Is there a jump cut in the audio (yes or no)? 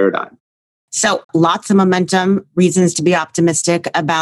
yes